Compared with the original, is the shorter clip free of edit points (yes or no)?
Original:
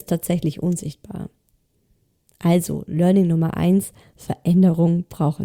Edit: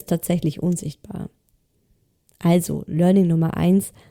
yes